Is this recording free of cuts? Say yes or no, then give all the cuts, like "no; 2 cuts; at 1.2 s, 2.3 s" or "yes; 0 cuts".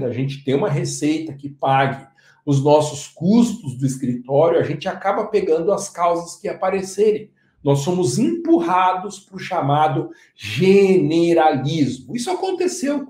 yes; 0 cuts